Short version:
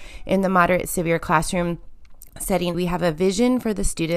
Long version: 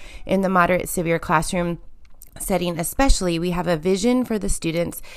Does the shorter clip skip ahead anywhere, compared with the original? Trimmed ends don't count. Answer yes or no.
yes